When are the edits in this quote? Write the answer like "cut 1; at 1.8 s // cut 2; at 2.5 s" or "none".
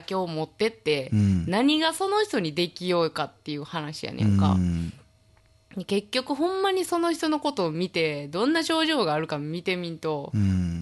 none